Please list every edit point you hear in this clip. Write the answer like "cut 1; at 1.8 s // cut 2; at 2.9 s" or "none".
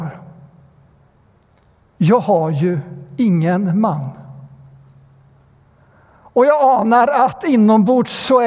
cut 1; at 1.8 s